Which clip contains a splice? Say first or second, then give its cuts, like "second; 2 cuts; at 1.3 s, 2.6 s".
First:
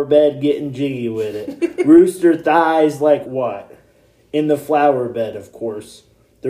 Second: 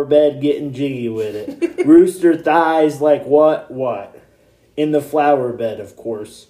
first; 1 cut; at 3.2 s